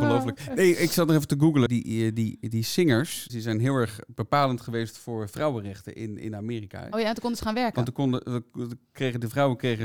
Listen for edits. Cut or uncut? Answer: cut